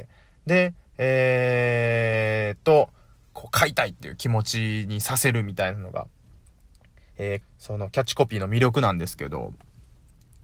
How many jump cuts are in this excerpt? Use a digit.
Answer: 1